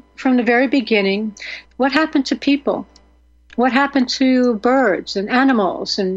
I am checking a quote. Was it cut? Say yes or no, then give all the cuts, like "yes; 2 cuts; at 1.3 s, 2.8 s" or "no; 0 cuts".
yes; 1 cut; at 1.6 s